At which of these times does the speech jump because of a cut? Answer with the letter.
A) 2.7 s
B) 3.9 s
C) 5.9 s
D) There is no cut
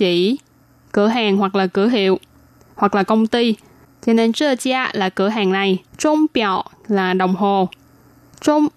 C